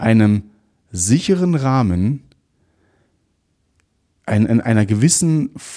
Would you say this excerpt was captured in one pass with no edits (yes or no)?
yes